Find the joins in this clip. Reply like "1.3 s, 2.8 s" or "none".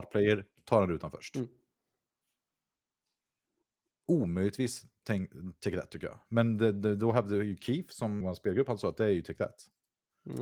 8.2 s